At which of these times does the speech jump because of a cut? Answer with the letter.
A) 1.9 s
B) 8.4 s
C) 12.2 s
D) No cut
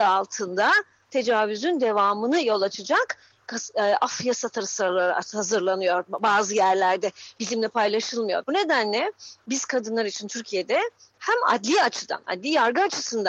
B